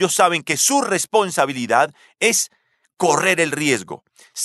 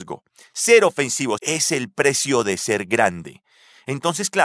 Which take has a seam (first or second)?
second